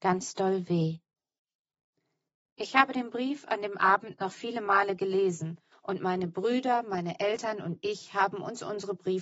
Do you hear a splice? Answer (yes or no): no